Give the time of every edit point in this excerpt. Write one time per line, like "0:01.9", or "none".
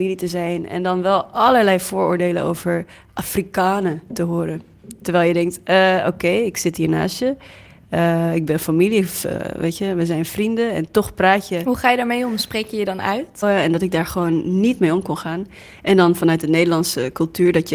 0:13.4